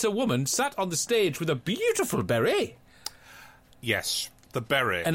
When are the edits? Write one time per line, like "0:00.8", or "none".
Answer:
none